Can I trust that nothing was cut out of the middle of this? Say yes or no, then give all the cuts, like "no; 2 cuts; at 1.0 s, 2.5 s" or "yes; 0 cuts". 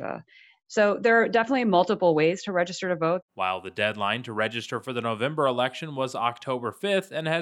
no; 1 cut; at 3.2 s